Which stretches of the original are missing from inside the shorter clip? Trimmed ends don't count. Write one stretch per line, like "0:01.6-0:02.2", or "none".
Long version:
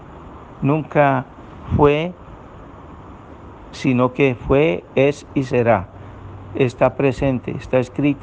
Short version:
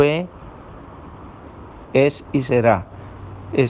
0:03.7-0:04.9